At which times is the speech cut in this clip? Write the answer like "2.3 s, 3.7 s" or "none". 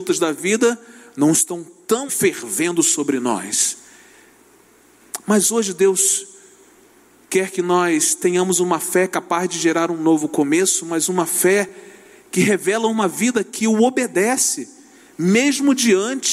2.1 s